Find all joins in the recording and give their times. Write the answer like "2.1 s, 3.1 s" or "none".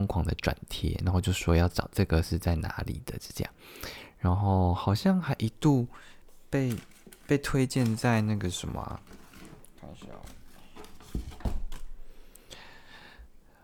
none